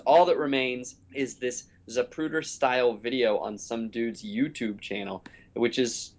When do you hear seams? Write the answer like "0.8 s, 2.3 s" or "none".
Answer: 1.0 s